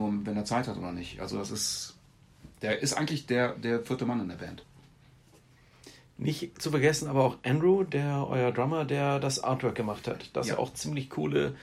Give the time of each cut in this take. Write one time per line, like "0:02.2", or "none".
none